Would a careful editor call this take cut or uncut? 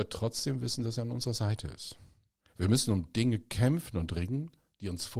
uncut